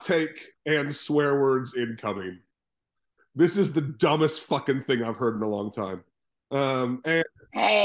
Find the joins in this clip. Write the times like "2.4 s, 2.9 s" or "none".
none